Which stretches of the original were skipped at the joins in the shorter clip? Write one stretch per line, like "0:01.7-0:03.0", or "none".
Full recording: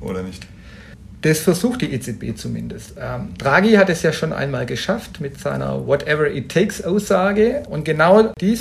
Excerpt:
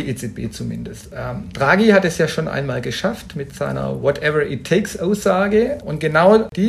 none